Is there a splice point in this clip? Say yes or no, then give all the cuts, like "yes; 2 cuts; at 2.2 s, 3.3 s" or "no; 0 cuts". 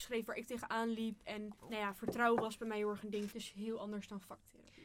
yes; 2 cuts; at 1.6 s, 3.3 s